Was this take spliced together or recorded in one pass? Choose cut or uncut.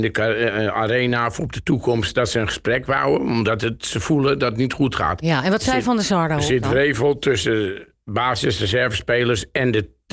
uncut